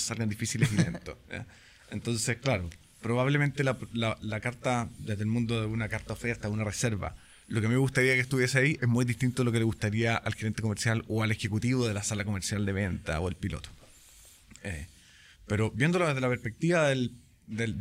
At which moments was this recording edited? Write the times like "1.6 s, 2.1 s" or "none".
none